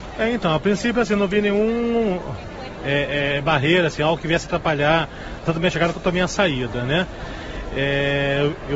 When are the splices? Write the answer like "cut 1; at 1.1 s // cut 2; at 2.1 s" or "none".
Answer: none